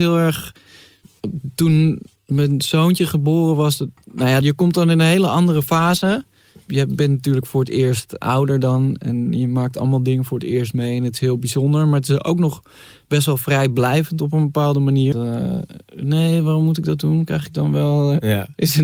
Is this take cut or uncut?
cut